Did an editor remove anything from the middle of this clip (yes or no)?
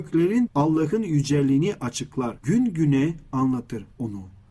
yes